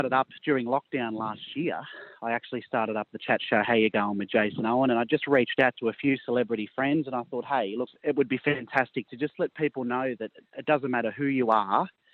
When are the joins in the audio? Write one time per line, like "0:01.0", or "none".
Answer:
0:07.9